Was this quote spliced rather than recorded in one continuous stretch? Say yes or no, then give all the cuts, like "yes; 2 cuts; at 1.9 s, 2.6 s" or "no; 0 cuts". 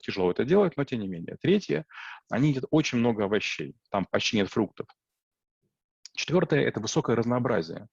no; 0 cuts